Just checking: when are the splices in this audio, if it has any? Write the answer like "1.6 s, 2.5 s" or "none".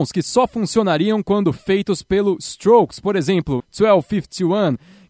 3.6 s